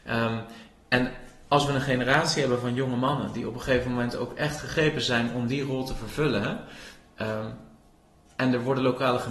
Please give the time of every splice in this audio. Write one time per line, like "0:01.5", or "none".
none